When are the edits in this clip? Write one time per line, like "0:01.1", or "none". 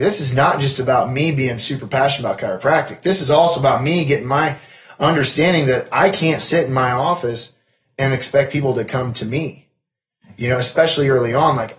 none